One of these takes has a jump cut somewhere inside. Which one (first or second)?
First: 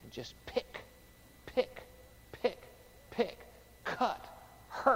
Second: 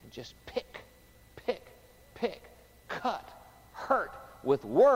second